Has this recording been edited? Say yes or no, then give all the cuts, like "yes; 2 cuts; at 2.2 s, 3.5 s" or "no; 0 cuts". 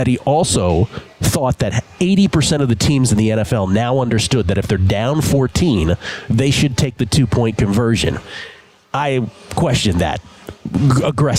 no; 0 cuts